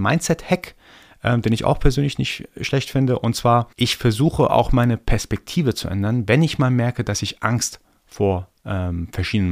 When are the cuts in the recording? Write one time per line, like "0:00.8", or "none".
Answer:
0:03.7